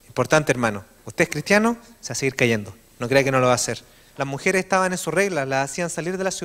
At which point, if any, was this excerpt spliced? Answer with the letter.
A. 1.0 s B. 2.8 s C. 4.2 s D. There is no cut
C